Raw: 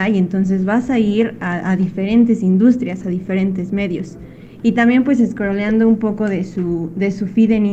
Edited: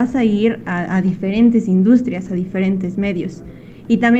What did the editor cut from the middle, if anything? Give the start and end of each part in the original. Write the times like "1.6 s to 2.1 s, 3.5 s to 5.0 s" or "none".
none